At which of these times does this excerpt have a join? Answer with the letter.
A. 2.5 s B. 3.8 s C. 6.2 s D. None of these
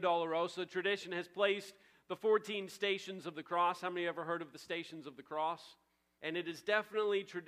C